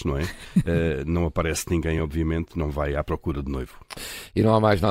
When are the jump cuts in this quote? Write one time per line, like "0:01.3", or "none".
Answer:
none